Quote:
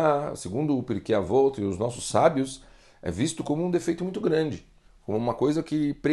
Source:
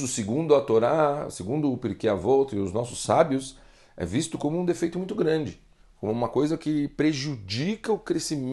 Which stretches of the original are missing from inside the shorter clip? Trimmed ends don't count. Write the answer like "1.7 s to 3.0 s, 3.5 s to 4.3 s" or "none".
none